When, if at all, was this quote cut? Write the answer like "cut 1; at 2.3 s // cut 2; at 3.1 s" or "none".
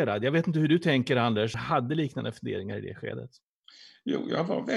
cut 1; at 1.5 s